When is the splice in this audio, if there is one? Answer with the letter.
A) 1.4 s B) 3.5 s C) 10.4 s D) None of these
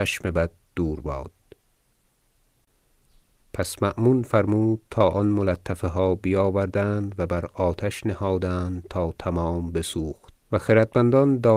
C